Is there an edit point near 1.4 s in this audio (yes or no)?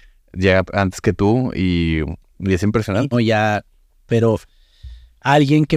no